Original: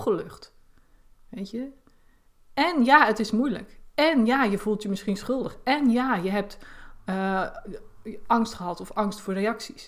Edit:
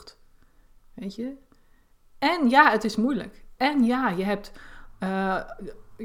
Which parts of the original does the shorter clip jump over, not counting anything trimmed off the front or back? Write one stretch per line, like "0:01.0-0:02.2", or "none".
0:03.9-0:05.6